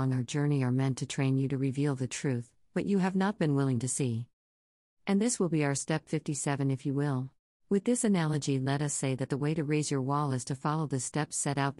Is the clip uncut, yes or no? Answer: no